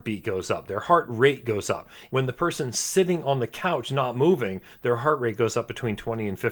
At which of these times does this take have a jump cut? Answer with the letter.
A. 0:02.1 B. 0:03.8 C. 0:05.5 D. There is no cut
A